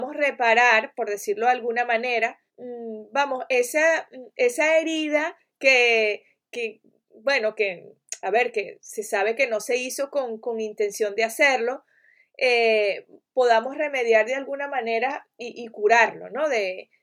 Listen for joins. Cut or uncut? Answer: cut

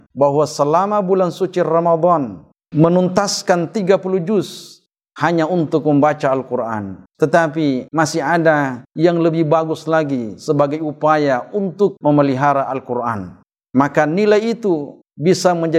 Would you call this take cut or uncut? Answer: cut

